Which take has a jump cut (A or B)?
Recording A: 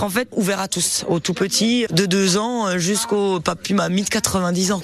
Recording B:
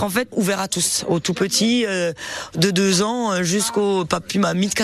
A